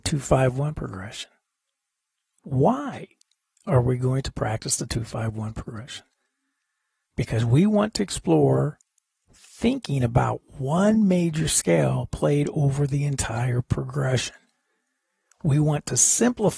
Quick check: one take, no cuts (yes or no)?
yes